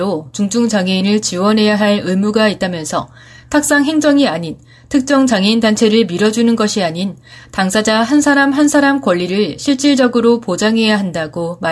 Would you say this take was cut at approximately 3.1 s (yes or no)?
no